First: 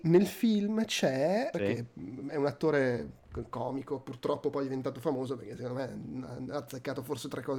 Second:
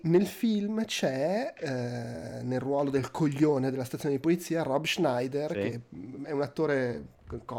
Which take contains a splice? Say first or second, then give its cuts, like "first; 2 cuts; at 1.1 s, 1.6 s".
first; 1 cut; at 1.5 s